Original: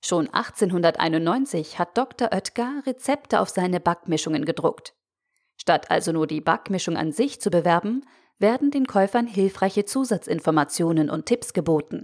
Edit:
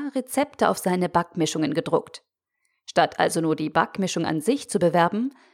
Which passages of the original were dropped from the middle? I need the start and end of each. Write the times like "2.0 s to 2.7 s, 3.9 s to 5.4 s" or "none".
none